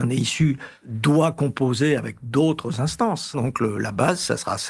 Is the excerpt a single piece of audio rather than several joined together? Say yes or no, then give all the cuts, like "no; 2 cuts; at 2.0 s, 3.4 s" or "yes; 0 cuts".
no; 1 cut; at 3.3 s